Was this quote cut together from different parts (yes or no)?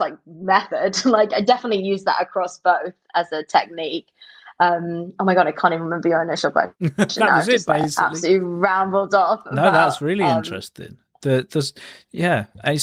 no